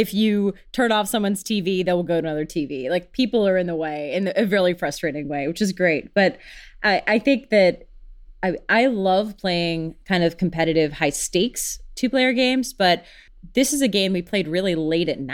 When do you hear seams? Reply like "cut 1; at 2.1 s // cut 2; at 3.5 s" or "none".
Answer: none